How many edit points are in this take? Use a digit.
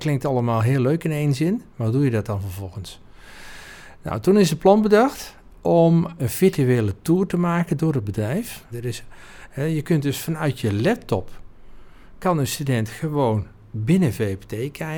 2